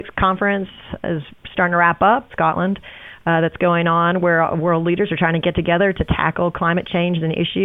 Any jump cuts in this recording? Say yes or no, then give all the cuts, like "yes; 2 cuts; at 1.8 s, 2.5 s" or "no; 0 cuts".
yes; 1 cut; at 2.3 s